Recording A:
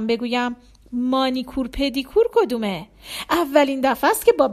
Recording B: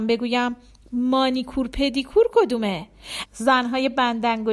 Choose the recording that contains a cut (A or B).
B